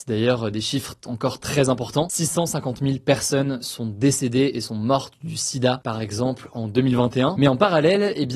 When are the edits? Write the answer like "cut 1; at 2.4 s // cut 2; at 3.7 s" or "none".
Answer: none